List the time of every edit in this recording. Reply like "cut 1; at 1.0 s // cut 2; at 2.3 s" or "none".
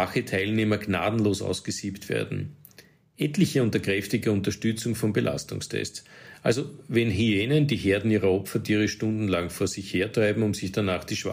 none